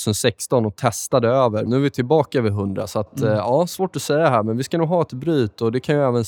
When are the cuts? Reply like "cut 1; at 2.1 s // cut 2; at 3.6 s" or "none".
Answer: cut 1; at 1.7 s